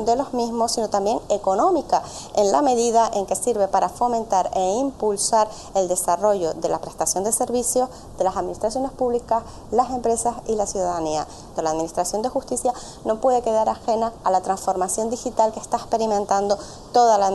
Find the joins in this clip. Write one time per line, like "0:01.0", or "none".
0:11.5